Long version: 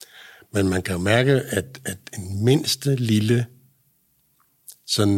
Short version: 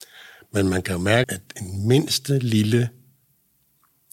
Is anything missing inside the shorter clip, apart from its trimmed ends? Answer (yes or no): yes